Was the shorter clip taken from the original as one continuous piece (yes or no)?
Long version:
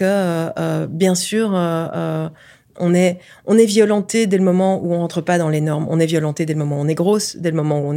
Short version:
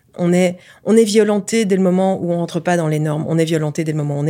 yes